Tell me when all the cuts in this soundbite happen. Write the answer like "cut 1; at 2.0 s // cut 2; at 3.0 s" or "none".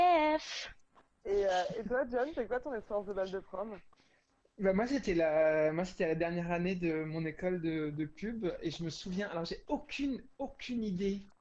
none